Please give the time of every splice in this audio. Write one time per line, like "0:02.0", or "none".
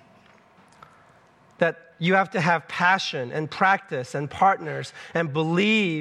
none

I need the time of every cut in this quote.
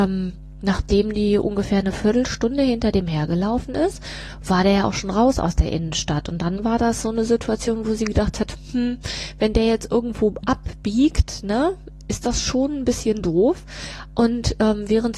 none

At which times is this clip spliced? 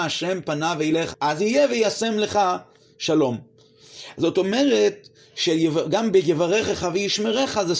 0:01.1

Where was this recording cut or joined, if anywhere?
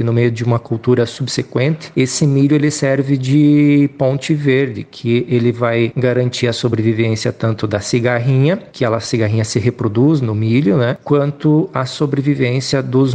none

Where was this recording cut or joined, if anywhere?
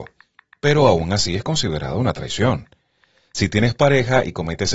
none

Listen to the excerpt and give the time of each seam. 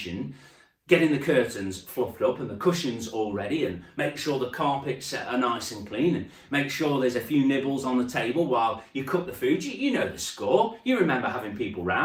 none

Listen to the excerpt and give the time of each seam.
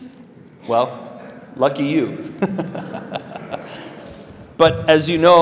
none

